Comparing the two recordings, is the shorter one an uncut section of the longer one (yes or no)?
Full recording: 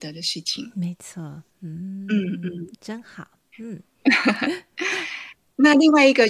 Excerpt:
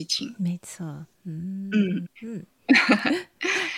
no